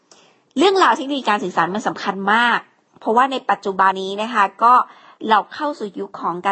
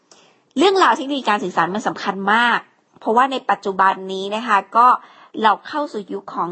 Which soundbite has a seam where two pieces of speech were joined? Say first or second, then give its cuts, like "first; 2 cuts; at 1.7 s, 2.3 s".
first; 1 cut; at 3.9 s